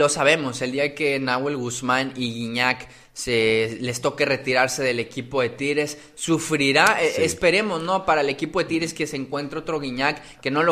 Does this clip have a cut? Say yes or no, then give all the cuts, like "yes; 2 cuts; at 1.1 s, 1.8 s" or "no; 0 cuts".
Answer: no; 0 cuts